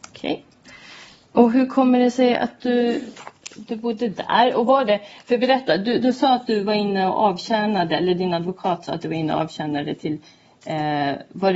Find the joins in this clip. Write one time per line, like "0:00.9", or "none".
none